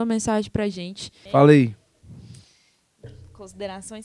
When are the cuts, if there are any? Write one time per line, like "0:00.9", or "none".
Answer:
0:01.3